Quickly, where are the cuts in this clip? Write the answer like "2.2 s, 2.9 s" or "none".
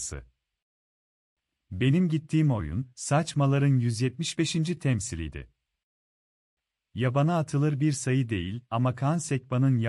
none